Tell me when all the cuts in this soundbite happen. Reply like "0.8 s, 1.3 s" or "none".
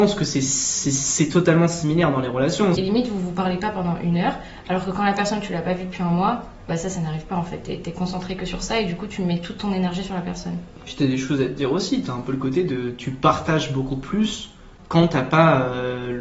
2.8 s